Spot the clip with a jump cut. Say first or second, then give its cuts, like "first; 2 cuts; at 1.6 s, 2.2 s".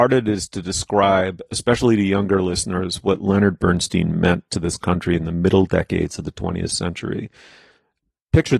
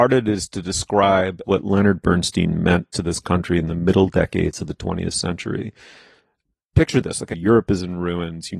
second; 2 cuts; at 1.4 s, 7.3 s